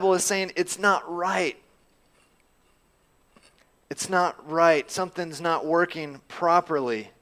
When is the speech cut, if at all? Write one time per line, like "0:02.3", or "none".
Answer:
none